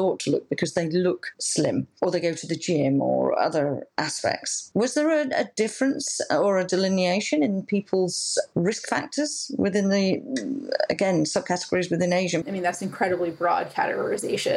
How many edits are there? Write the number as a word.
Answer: two